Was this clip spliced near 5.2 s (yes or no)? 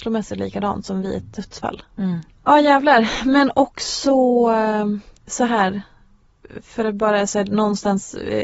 yes